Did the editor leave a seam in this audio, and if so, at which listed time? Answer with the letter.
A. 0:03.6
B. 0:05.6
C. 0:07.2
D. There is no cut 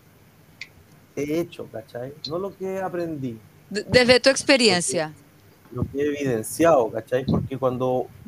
A